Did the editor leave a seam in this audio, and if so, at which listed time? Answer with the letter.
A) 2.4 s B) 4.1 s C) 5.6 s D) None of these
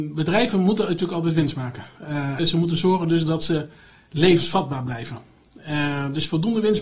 A